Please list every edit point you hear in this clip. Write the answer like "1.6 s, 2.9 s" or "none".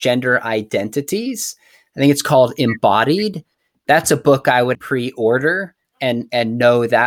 4.7 s